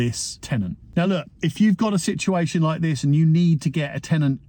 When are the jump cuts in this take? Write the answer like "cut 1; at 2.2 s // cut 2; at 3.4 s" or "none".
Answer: none